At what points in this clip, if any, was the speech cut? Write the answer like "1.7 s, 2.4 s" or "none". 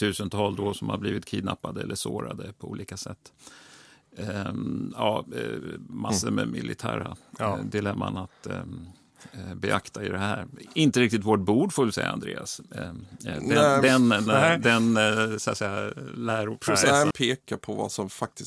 14.3 s, 17.1 s